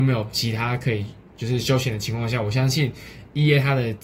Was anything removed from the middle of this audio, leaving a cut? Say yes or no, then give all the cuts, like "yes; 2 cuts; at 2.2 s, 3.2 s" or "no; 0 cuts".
no; 0 cuts